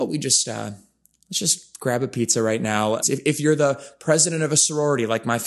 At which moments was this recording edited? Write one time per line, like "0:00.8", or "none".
0:03.0